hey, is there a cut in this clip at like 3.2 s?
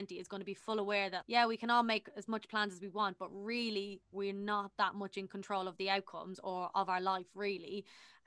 no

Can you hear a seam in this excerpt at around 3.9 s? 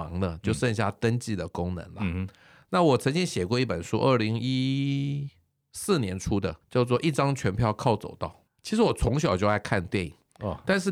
no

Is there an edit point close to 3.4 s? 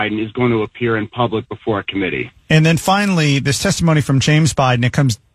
no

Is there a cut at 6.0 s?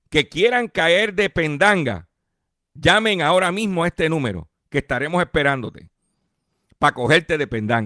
no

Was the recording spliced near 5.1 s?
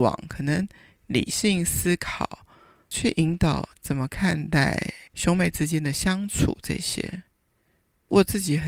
yes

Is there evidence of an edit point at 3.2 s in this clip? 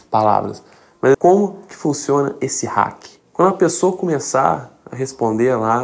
no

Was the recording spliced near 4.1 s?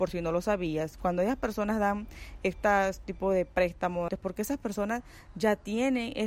yes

